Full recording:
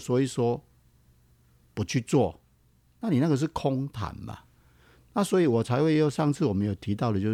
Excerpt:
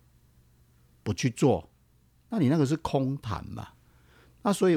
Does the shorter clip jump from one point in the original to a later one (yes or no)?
no